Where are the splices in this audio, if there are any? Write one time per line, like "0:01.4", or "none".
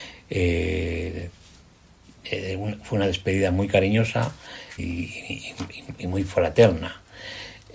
0:04.8